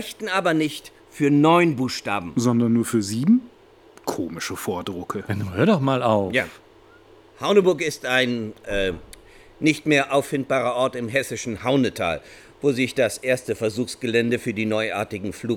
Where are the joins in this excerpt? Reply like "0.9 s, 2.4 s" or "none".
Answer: none